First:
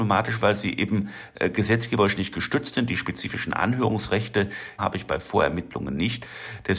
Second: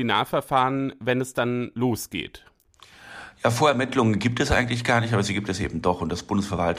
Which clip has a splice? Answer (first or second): first